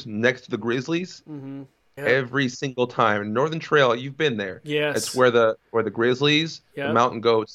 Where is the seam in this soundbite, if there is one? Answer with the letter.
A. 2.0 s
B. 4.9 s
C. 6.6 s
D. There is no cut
A